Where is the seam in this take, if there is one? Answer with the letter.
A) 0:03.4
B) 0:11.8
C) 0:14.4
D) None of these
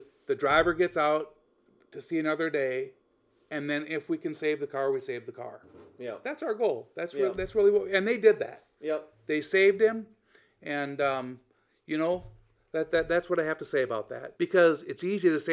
C